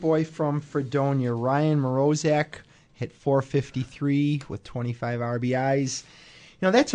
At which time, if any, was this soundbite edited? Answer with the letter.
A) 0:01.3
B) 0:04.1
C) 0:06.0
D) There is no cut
D